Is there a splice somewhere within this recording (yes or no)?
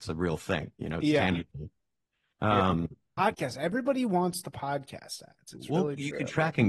yes